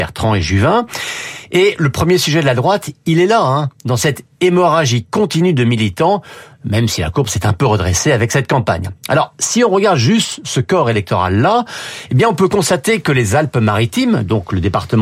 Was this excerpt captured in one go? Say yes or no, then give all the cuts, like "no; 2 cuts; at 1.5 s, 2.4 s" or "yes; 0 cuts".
yes; 0 cuts